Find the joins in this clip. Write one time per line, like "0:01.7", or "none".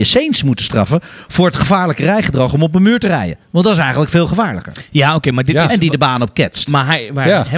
0:03.4